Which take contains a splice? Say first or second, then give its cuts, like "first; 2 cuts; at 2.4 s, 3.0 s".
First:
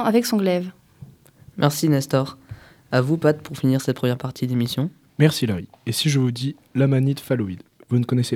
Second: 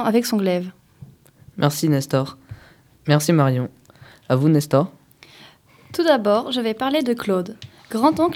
second; 1 cut; at 2.9 s